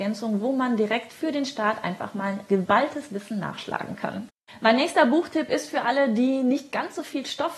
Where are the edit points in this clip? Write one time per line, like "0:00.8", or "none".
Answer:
none